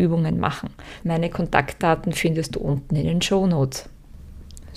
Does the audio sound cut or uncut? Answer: cut